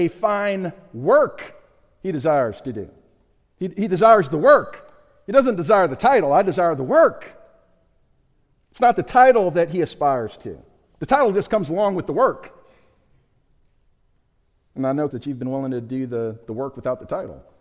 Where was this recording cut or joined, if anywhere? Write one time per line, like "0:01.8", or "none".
0:15.1